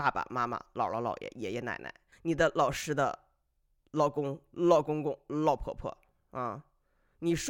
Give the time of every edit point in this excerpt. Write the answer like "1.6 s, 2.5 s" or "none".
2.1 s